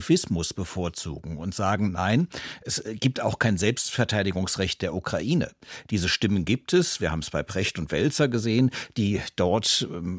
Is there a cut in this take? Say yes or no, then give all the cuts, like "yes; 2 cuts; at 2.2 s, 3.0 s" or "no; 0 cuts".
no; 0 cuts